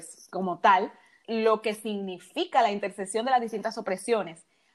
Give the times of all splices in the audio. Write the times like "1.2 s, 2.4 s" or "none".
1.2 s